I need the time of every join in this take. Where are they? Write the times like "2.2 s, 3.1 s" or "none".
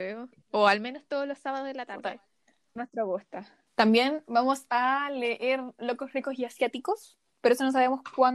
2.8 s

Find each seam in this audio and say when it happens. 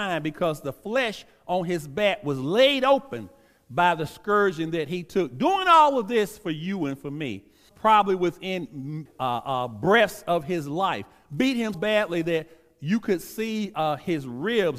7.7 s, 9.1 s, 11.7 s

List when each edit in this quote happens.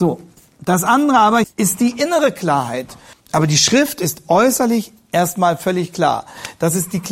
1.4 s, 3.1 s

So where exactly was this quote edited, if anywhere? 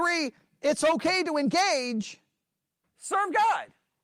2.8 s

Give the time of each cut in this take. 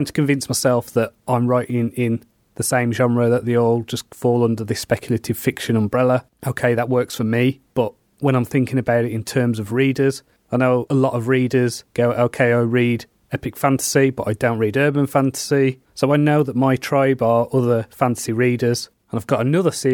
7.7 s, 15.8 s, 19.0 s

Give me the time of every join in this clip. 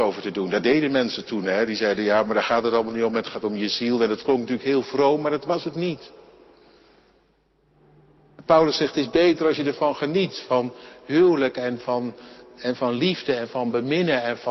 none

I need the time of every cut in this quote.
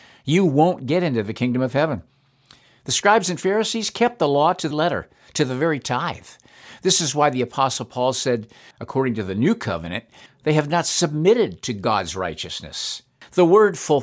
4.7 s, 8.7 s, 10.3 s

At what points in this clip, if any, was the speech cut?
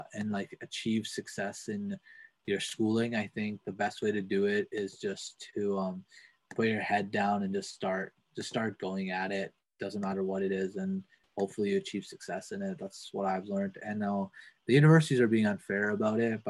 none

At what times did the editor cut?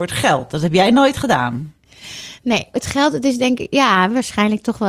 2.7 s

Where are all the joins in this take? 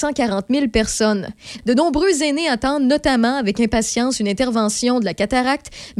1.6 s

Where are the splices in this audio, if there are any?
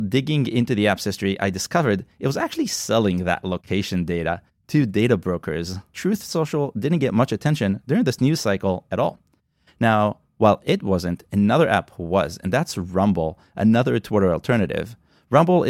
5.9 s

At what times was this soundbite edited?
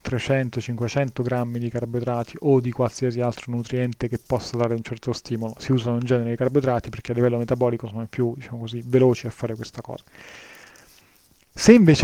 none

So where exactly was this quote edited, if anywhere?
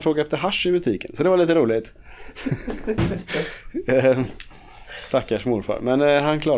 none

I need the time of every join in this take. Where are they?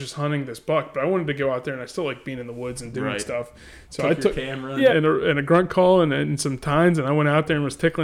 4.9 s

